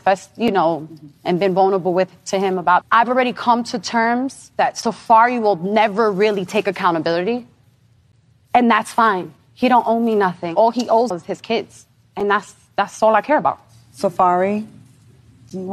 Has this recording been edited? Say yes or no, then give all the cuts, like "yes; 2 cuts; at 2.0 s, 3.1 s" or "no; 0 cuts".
yes; 2 cuts; at 2.8 s, 11.1 s